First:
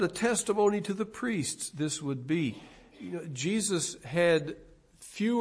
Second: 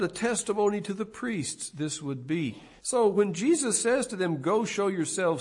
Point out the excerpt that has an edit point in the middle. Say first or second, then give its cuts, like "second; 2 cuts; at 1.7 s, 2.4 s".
second; 1 cut; at 2.8 s